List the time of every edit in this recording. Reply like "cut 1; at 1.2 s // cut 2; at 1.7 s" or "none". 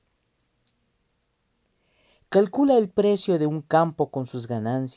none